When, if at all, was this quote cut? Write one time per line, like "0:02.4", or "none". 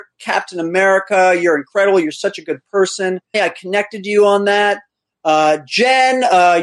0:03.3